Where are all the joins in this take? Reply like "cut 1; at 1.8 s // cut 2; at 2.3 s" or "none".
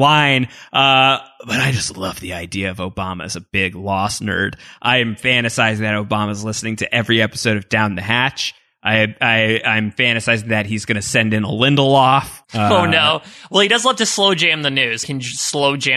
cut 1; at 12.4 s // cut 2; at 15.0 s

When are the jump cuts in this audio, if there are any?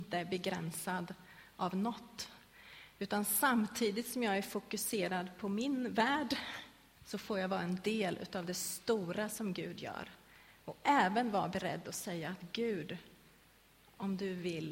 cut 1; at 7.0 s

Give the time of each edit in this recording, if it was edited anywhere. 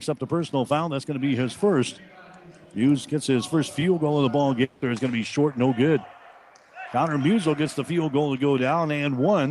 cut 1; at 4.8 s // cut 2; at 6.9 s

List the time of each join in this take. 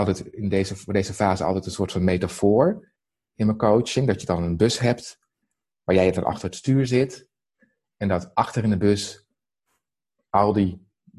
none

